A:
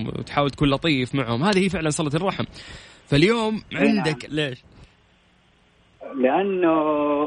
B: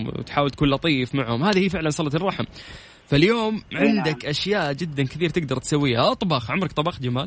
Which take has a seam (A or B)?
A